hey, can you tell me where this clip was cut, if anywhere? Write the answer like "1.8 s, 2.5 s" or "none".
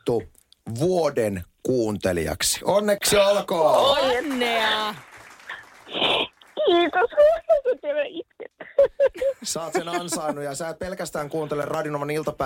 none

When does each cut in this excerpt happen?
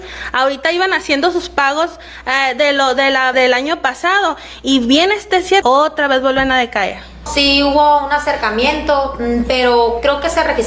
3.3 s, 5.6 s, 7.3 s

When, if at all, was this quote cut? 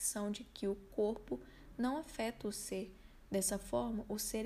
none

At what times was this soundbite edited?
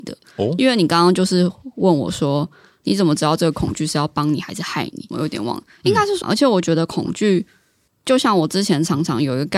5.1 s, 6.2 s

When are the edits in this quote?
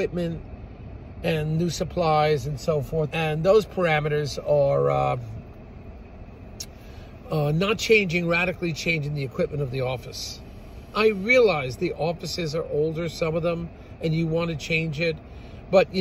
3.1 s, 10.9 s

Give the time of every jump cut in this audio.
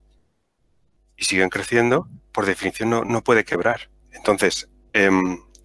4.0 s

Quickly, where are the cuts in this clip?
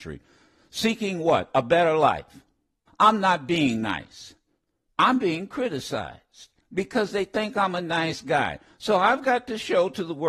2.9 s, 4.9 s

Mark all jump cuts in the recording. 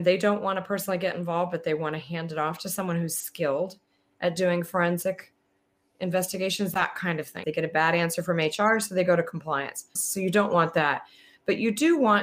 7.4 s, 10.0 s

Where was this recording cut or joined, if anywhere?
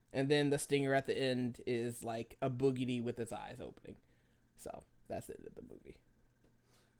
5.1 s

